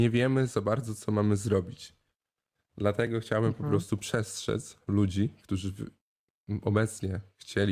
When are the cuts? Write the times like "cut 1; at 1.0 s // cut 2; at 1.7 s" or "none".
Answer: none